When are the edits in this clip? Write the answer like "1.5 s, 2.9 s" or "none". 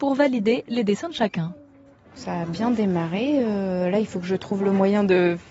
none